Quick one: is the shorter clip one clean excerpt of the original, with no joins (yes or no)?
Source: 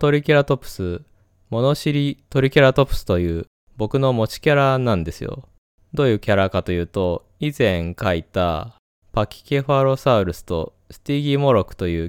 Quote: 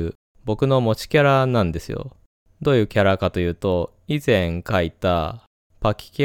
yes